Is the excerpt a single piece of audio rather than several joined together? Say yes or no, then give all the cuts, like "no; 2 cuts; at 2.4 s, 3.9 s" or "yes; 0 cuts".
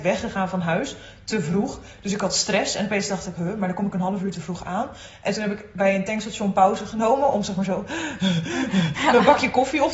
yes; 0 cuts